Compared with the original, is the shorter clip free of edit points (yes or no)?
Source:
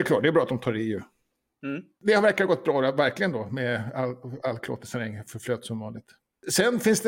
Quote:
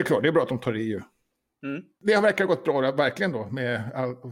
yes